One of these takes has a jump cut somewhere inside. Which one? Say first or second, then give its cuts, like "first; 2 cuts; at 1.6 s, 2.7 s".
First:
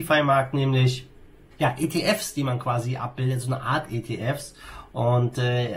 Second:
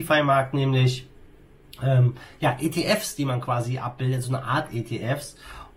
first; 1 cut; at 1.5 s